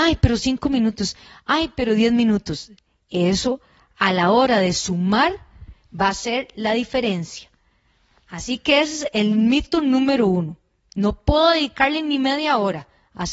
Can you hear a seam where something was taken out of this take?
no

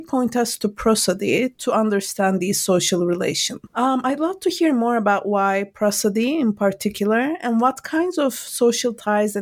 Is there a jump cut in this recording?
yes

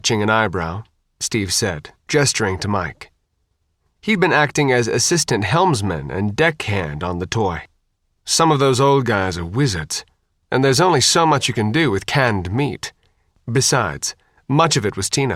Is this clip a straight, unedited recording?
no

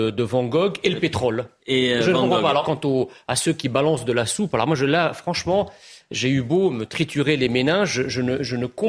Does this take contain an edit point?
yes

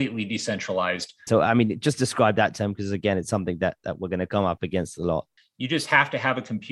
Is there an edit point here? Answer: yes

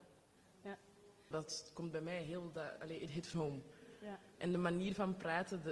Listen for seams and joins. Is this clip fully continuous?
no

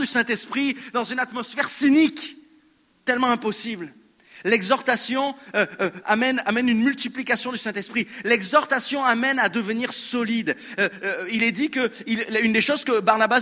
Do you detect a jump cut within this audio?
yes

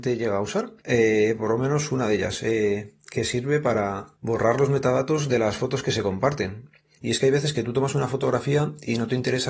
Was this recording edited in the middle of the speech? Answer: yes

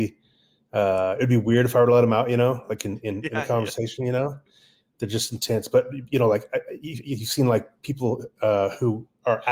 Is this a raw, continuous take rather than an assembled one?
yes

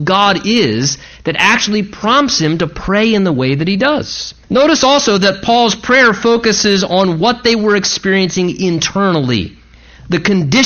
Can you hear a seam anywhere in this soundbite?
yes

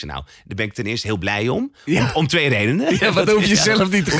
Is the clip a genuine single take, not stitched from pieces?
yes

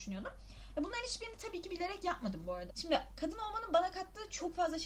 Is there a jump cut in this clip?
yes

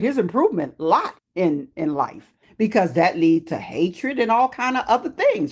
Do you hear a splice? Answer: yes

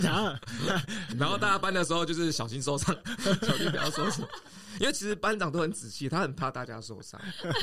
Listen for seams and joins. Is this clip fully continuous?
no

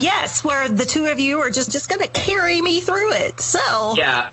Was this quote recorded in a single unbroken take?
no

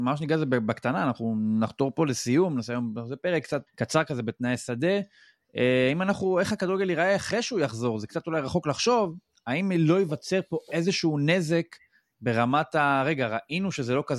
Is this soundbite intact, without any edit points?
no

